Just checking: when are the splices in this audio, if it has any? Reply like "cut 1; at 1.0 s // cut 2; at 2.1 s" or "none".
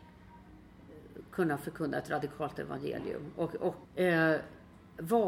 cut 1; at 3.8 s